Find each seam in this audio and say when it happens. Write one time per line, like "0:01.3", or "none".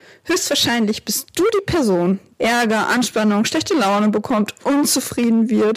0:02.3